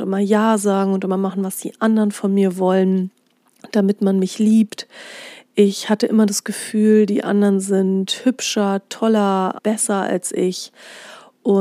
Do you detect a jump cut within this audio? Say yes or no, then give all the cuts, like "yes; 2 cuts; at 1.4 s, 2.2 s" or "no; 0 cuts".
yes; 1 cut; at 9.6 s